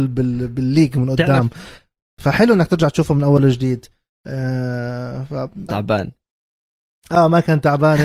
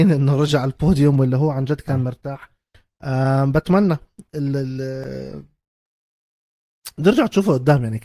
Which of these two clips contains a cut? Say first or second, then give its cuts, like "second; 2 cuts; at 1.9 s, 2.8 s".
first; 1 cut; at 5.7 s